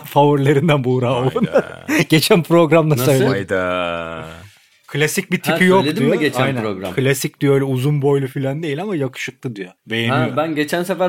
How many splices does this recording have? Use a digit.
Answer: 1